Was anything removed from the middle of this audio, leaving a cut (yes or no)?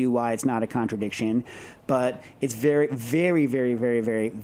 no